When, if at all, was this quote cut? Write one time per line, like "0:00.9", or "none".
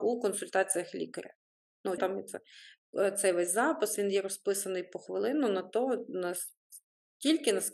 0:02.0

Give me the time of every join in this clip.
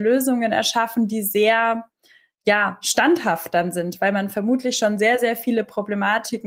none

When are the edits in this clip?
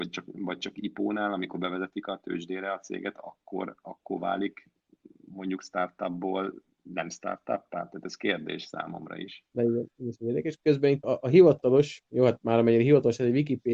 0:11.0

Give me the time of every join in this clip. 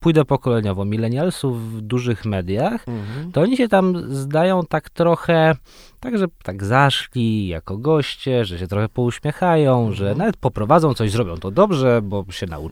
none

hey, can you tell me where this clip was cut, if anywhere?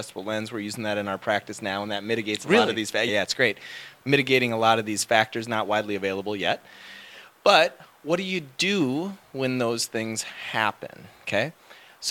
0:03.1

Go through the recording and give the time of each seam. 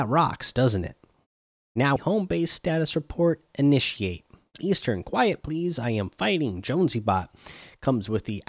0:02.0
0:04.6

